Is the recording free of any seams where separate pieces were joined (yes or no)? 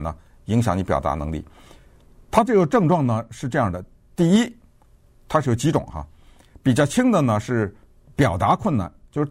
yes